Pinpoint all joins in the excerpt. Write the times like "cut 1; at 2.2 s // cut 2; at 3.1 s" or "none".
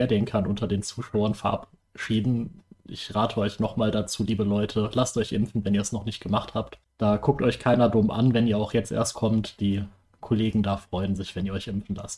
none